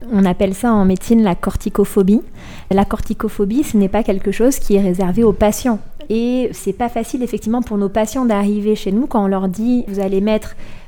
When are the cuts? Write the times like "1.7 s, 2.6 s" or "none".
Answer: 6.0 s